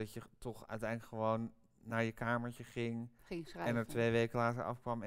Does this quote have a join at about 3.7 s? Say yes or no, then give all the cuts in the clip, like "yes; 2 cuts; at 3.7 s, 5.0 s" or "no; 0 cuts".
no; 0 cuts